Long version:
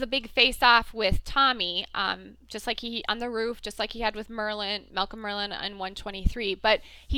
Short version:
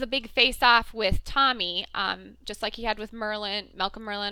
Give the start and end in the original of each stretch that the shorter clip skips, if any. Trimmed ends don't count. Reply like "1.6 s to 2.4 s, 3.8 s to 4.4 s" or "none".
2.4 s to 3.6 s